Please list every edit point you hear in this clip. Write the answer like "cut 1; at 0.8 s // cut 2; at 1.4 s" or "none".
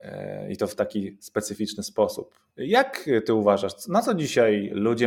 cut 1; at 2.5 s